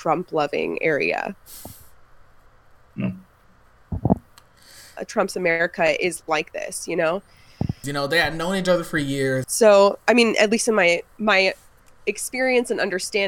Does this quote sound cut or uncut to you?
cut